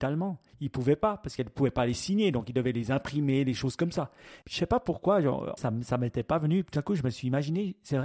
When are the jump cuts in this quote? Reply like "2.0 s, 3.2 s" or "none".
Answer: 4.4 s, 5.6 s